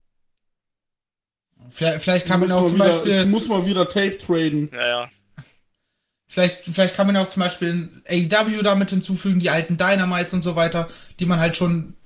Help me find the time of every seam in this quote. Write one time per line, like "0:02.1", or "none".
none